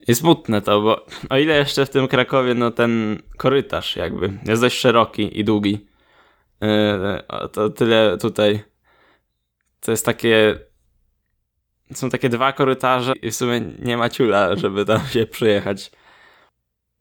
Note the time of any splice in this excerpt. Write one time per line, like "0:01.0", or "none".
0:13.1